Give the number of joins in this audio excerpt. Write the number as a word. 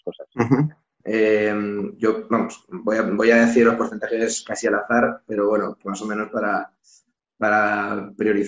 one